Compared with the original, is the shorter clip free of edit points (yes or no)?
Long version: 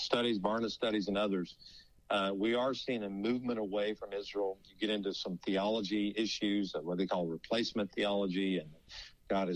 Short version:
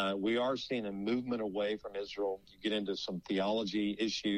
yes